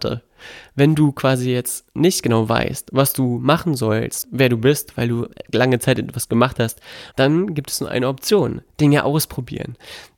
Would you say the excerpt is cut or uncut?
cut